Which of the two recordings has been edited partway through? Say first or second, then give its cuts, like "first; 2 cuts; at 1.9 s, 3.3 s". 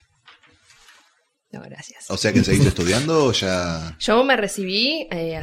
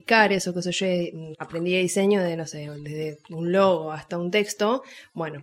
second; 1 cut; at 1.3 s